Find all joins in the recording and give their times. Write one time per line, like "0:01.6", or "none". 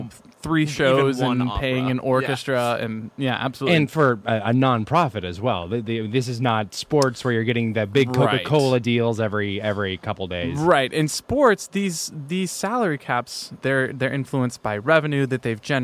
0:13.6